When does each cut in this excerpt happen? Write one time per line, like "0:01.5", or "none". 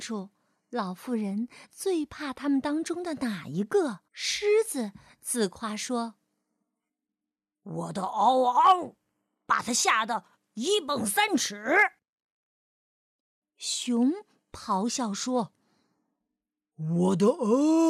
0:04.1